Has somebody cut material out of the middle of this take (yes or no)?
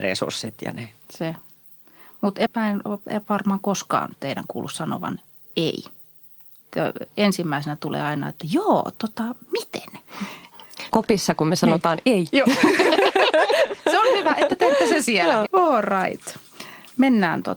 yes